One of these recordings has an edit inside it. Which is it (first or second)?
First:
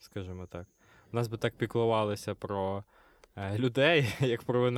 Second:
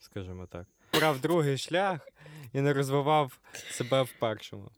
second